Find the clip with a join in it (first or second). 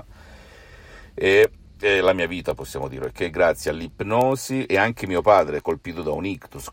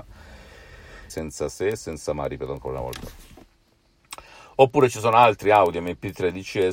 second